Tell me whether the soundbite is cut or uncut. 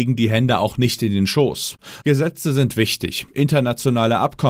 cut